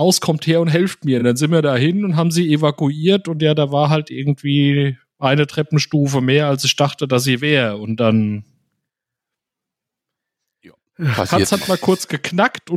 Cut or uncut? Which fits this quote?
uncut